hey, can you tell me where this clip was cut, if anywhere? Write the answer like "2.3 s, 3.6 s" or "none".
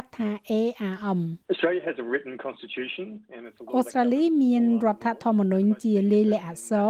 1.4 s